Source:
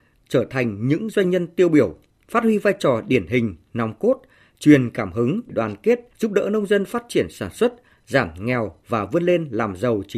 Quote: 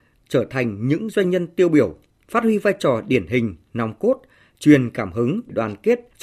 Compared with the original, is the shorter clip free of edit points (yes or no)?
yes